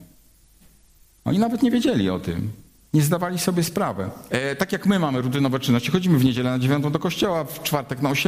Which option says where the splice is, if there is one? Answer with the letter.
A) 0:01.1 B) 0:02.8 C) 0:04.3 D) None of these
C